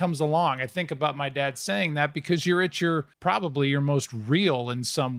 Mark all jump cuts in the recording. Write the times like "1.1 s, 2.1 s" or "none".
3.1 s